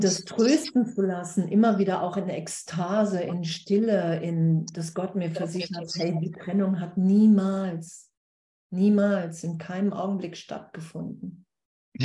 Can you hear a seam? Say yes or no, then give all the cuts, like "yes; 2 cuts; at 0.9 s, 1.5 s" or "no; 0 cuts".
no; 0 cuts